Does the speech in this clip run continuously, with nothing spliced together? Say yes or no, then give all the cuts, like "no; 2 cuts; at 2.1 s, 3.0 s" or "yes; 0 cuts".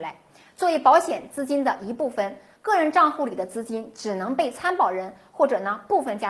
yes; 0 cuts